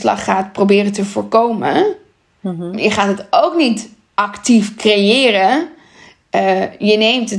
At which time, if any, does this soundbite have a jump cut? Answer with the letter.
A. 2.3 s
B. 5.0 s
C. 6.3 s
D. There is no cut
D